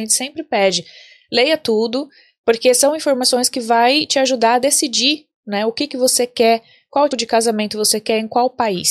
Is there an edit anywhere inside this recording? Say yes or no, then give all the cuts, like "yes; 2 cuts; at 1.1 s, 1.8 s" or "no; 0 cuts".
yes; 1 cut; at 7.1 s